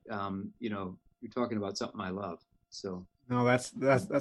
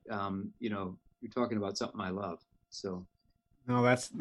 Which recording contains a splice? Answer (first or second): first